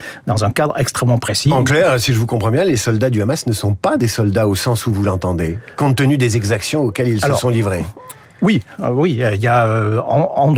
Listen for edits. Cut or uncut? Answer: uncut